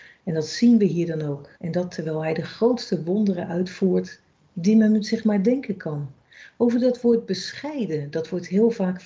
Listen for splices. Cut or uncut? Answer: cut